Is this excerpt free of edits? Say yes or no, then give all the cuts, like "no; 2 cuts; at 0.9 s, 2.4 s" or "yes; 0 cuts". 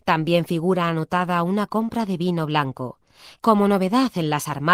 no; 1 cut; at 3.4 s